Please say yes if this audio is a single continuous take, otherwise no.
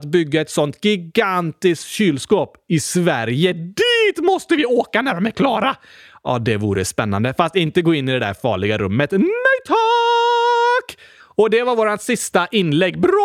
yes